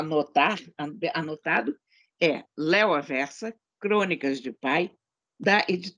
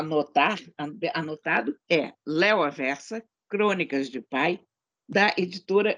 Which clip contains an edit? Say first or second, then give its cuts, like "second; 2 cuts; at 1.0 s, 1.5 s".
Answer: second; 1 cut; at 1.8 s